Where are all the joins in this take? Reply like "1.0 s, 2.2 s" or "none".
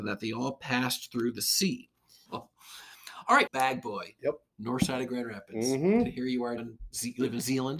2.3 s, 3.5 s, 6.6 s